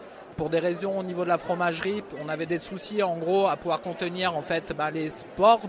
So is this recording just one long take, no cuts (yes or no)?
yes